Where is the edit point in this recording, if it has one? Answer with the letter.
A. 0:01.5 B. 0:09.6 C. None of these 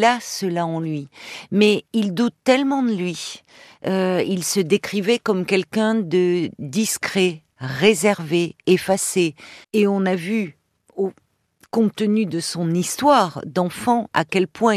B